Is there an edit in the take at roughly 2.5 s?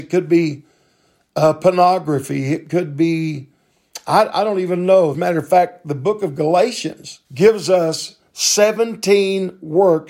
no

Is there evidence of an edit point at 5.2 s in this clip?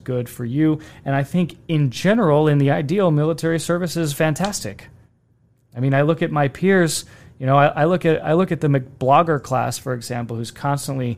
no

